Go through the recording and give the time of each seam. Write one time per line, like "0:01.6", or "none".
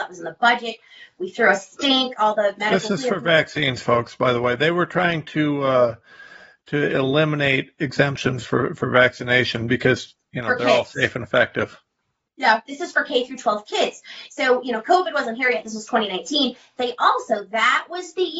none